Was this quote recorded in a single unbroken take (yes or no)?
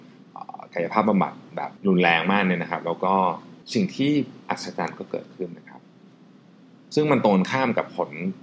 no